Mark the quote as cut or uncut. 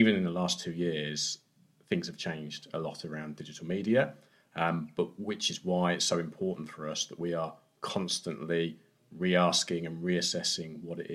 uncut